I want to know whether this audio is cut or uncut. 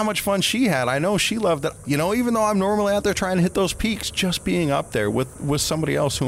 cut